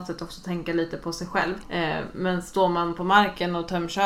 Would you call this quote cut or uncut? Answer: cut